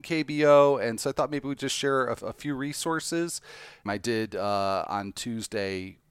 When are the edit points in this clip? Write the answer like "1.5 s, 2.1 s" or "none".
3.9 s